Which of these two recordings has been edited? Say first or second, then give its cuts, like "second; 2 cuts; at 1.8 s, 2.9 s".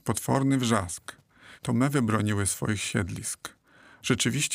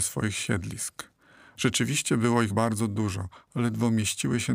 second; 1 cut; at 2.5 s